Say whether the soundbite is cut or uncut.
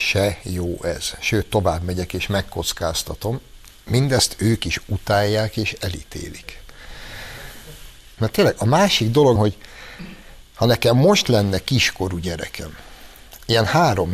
cut